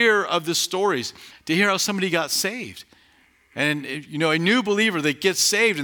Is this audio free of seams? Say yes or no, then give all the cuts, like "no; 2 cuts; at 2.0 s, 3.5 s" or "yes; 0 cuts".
no; 1 cut; at 1.3 s